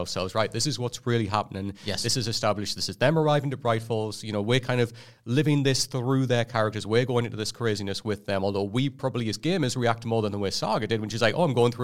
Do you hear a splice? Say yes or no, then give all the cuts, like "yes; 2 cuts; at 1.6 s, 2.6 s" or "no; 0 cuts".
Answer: no; 0 cuts